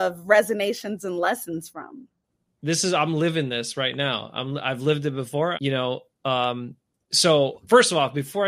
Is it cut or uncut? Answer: cut